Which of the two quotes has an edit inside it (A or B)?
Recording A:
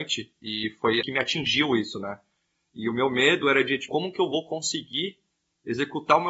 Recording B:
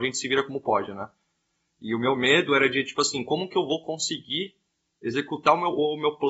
A